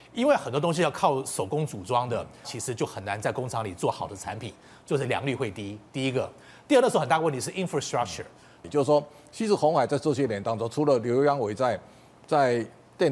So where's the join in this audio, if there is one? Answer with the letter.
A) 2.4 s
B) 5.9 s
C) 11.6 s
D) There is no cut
A